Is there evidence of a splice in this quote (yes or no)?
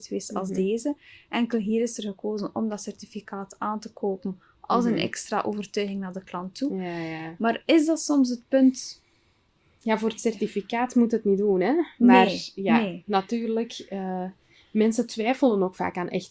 no